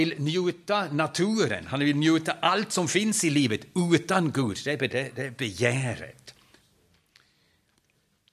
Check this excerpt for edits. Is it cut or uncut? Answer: cut